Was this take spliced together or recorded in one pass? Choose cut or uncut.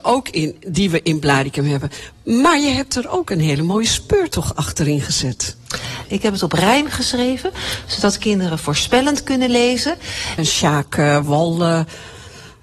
cut